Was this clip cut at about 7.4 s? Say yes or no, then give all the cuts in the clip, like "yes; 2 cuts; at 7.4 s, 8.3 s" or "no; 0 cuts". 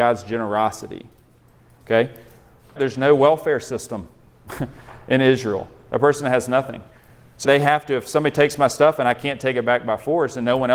yes; 2 cuts; at 2.8 s, 7.4 s